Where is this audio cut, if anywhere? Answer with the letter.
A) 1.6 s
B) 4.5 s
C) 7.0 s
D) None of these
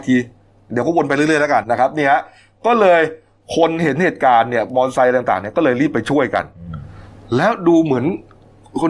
A